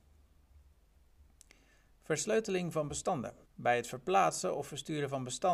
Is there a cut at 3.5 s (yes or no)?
yes